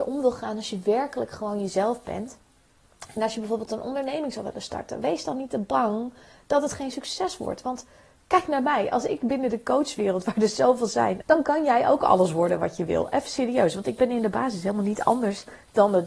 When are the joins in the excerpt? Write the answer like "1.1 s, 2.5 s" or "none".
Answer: 11.2 s